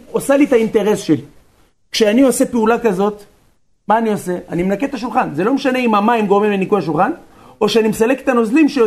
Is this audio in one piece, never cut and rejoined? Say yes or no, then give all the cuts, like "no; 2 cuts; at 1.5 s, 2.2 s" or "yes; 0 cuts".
yes; 0 cuts